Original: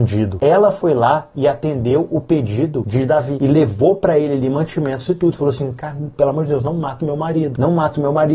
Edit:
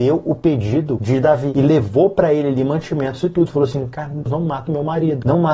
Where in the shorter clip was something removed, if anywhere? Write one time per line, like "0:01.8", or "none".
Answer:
0:04.3